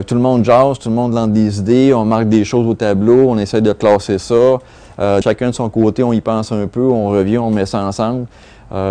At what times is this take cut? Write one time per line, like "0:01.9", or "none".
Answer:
0:05.2